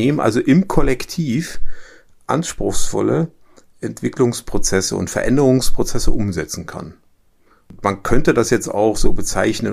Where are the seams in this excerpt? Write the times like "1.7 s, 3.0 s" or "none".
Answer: none